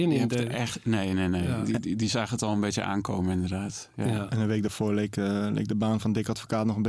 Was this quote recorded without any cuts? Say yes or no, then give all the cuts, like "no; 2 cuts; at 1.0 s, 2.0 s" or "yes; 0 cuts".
yes; 0 cuts